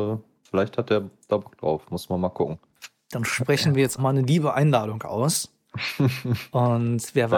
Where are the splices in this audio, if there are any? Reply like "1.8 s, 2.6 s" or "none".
4.0 s

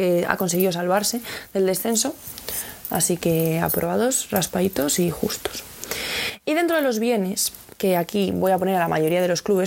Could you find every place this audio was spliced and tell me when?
none

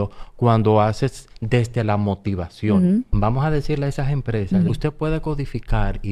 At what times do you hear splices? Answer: 3.1 s, 4.7 s

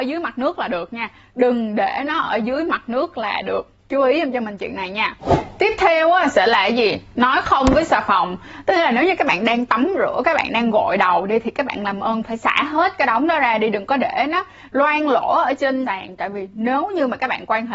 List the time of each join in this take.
3.8 s

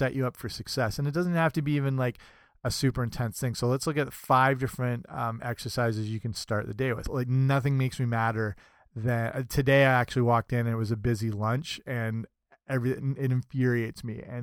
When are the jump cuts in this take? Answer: 7.0 s, 13.0 s

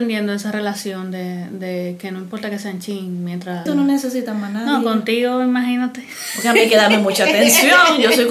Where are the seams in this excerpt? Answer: 3.7 s

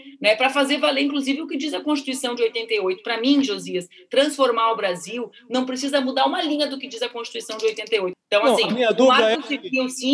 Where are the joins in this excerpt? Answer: 8.1 s

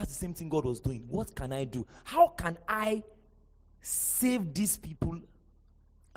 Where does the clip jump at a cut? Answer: none

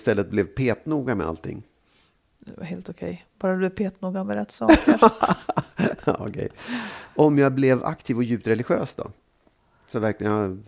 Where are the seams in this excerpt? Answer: none

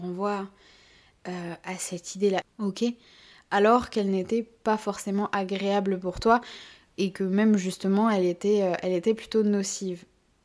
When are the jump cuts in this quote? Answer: 2.4 s

